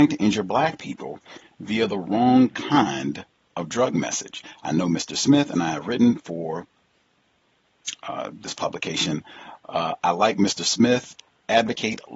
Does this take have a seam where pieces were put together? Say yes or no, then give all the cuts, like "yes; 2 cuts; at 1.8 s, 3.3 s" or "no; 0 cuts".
no; 0 cuts